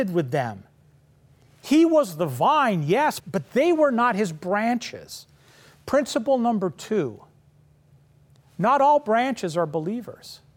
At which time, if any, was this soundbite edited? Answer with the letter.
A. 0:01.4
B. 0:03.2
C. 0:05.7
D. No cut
B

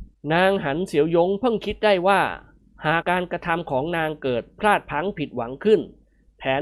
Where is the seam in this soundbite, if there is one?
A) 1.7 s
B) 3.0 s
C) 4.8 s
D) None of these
B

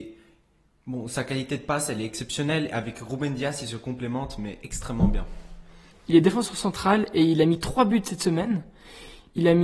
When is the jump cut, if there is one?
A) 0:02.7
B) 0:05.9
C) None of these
B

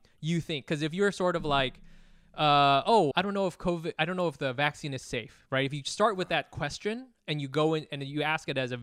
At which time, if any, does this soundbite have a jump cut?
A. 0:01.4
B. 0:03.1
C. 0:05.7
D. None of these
B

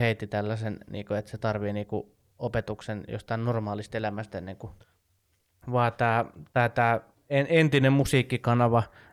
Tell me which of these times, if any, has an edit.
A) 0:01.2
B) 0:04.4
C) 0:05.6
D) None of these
C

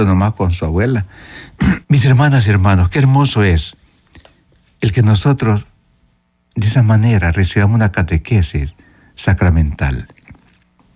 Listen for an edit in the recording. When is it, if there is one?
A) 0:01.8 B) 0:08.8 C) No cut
A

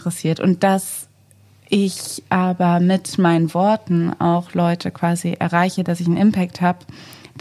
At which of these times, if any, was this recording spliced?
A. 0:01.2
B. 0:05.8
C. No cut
C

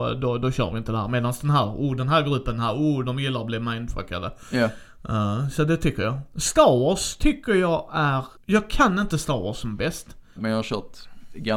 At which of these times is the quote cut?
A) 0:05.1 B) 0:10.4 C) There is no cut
B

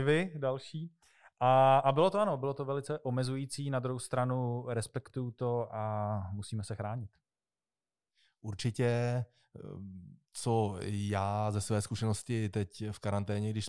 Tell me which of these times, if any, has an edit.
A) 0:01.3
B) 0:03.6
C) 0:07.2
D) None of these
D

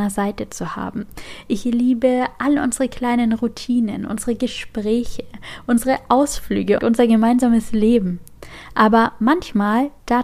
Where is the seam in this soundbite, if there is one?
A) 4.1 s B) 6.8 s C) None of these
B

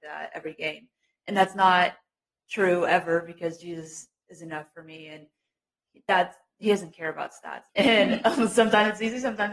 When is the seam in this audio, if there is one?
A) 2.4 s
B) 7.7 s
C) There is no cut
B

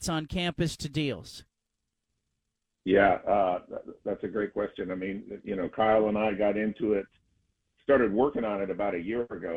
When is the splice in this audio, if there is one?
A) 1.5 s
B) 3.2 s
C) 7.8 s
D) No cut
D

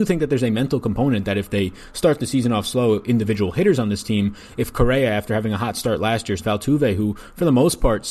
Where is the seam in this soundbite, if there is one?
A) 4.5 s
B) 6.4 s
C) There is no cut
B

